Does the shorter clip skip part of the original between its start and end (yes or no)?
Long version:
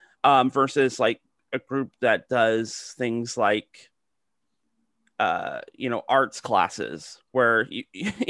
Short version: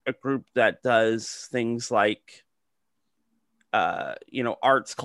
no